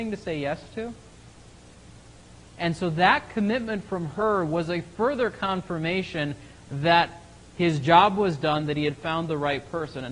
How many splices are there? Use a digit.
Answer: 0